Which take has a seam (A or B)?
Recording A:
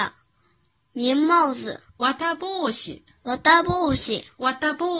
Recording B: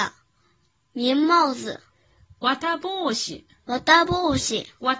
A